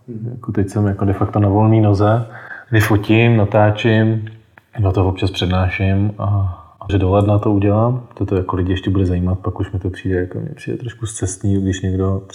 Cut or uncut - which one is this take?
cut